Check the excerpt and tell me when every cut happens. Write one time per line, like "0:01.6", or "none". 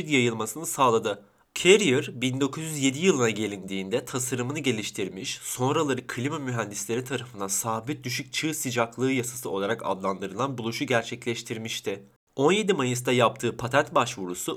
0:01.5